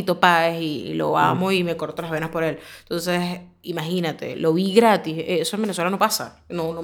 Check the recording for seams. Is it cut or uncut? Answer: uncut